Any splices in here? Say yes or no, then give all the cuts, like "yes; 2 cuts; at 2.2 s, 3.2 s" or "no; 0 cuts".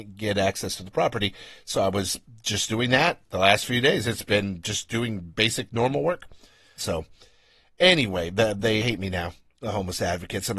yes; 2 cuts; at 6.8 s, 8.8 s